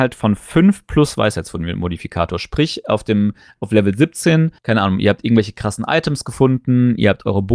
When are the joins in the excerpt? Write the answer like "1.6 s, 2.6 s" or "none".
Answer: 4.6 s